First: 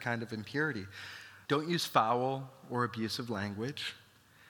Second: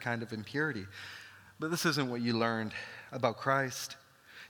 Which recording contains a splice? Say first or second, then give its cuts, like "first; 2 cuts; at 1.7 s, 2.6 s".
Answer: first; 1 cut; at 1.5 s